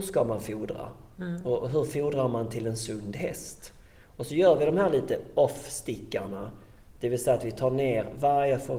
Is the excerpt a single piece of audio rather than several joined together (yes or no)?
yes